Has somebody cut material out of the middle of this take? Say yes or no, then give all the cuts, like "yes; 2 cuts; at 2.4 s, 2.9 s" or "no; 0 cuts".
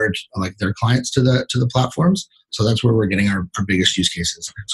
no; 0 cuts